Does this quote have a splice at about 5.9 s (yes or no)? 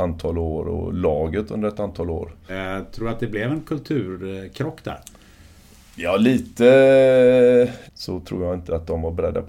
no